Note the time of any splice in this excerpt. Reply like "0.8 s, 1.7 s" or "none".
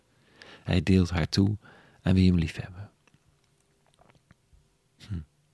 none

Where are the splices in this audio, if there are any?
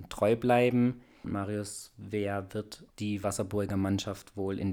1.2 s, 2.9 s

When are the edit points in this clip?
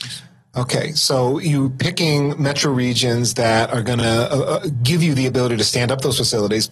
none

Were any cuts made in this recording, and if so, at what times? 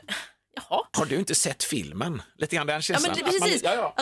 0.9 s

